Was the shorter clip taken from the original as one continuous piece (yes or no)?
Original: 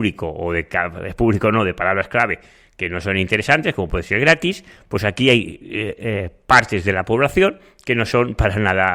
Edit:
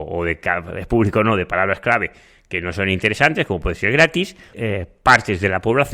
no